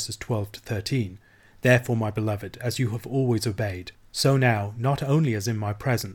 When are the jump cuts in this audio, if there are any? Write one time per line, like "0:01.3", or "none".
none

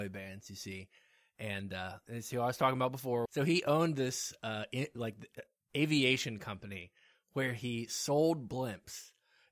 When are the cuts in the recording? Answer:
0:03.3

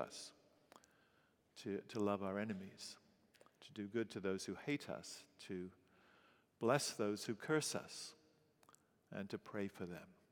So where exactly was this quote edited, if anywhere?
none

